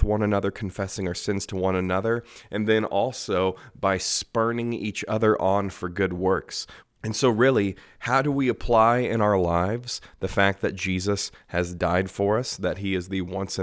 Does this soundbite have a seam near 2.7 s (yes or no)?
no